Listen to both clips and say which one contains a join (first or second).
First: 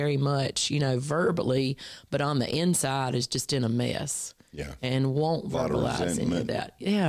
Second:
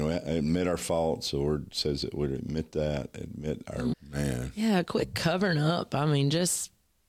second